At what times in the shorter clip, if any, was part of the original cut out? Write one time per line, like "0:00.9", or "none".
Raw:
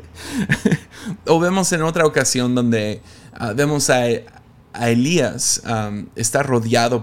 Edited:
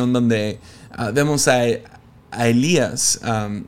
none

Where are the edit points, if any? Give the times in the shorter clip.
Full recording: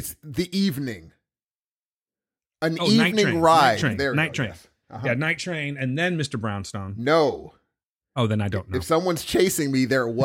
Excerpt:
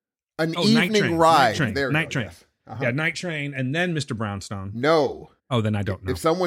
0:05.4

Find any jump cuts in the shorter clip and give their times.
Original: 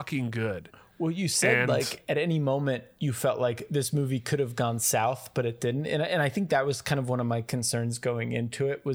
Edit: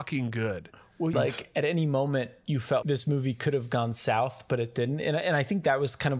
0:01.1
0:02.8

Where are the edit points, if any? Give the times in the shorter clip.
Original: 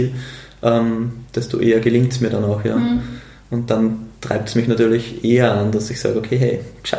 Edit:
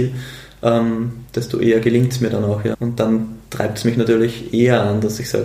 0:02.7

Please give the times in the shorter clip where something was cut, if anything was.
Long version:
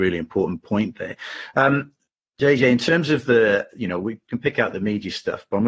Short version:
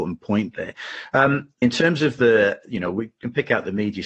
0:01.6

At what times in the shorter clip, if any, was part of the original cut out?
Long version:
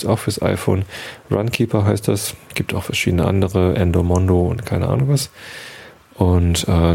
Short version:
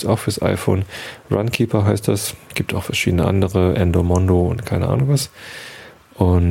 none

